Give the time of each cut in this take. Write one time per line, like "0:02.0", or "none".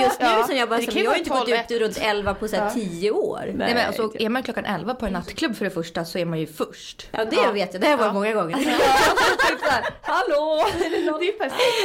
none

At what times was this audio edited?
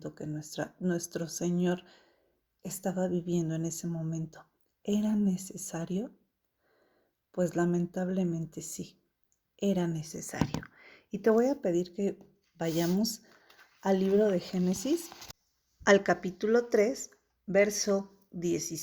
none

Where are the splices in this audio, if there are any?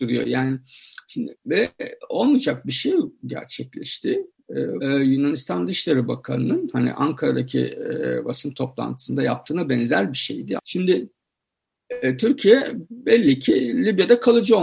0:04.8
0:10.6

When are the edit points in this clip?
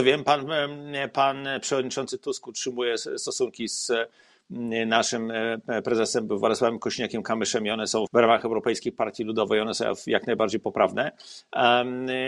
0:08.1

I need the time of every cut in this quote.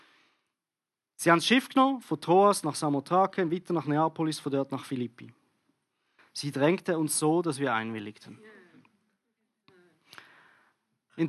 0:06.2

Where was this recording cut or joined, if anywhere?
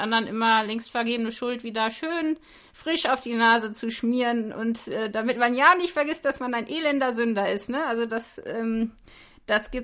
none

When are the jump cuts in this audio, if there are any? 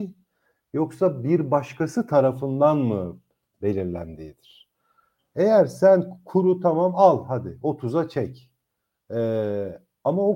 none

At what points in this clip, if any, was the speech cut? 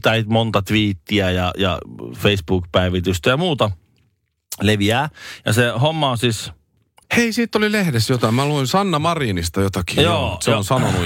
0:07.0

